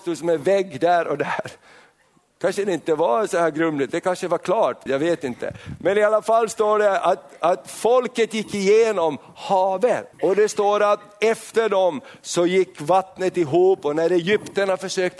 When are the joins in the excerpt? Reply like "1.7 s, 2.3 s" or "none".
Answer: 4.9 s, 10.1 s